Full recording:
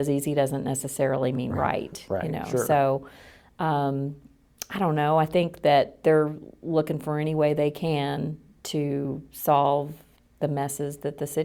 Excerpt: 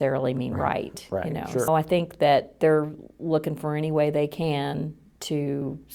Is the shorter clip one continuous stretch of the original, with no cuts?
no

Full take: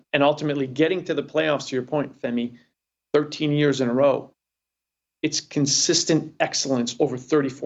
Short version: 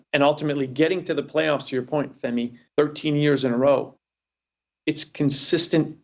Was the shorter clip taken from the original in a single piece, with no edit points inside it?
no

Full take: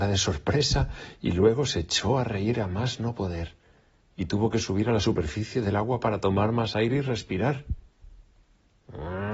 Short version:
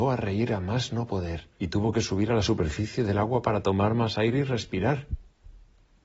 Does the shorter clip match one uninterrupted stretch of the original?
no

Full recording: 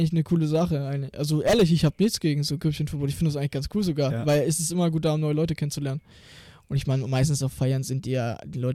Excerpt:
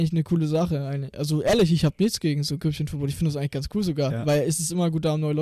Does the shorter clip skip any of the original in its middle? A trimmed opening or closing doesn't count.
no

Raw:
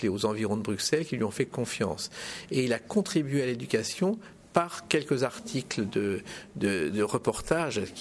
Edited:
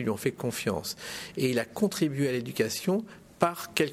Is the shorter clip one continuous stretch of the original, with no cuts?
yes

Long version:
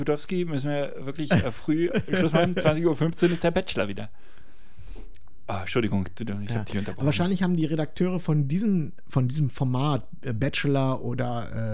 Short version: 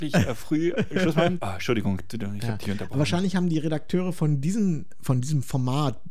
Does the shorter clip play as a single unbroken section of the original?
no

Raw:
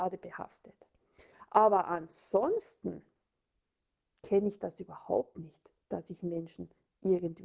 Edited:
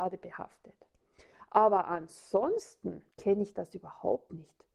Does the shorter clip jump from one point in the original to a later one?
yes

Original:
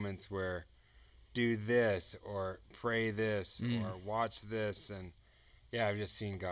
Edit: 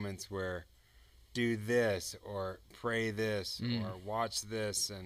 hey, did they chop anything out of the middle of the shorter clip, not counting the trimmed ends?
no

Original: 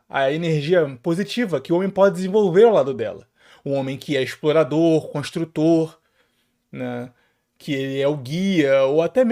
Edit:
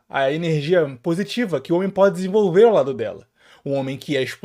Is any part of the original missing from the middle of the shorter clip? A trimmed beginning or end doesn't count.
no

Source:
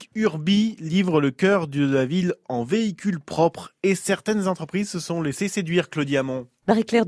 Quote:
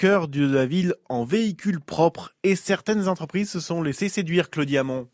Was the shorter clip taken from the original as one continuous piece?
yes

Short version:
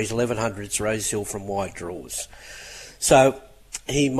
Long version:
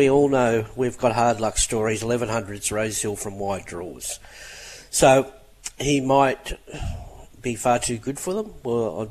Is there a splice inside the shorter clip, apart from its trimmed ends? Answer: no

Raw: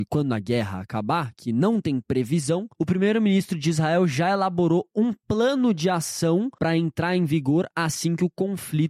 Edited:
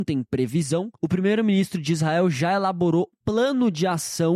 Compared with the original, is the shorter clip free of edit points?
no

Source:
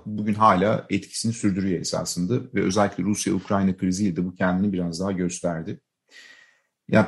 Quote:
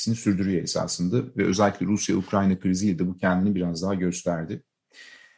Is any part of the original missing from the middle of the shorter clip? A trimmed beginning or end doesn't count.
no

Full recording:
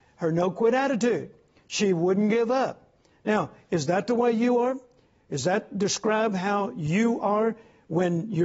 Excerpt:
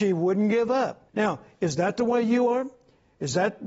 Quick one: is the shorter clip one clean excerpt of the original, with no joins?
no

